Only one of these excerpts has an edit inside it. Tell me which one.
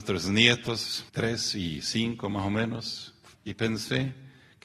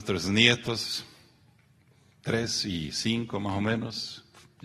first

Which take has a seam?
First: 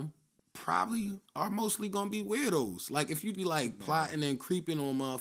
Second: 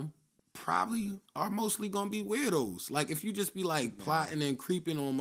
first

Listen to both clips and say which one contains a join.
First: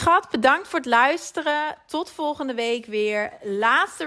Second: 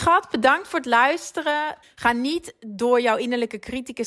second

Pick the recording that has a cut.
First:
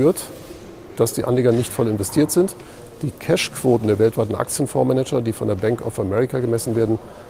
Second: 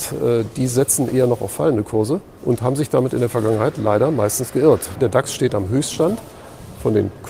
second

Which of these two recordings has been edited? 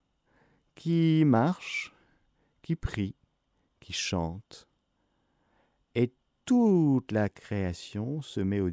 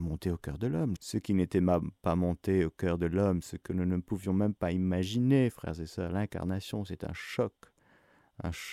second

